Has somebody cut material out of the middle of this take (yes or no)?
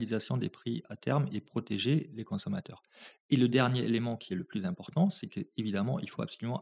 no